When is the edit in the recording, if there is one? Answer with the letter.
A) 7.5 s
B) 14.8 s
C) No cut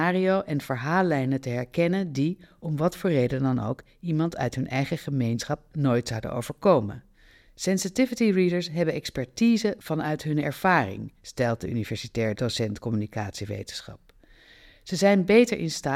A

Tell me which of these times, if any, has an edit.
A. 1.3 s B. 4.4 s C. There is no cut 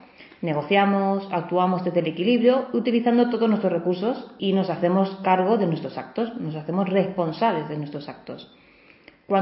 B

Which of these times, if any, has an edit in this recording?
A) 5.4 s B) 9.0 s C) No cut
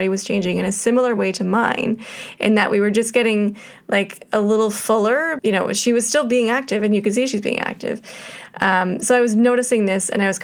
A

